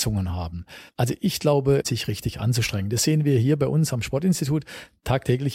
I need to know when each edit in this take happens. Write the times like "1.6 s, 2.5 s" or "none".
1.8 s